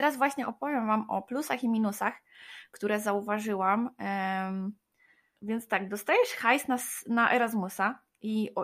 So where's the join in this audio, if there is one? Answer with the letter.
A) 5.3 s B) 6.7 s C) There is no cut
A